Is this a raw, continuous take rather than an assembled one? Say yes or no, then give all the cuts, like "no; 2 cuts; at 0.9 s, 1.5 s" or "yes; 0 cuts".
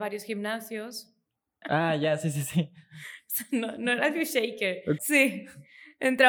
no; 2 cuts; at 1.6 s, 5.0 s